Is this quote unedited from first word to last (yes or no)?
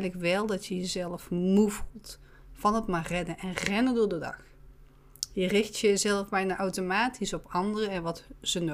yes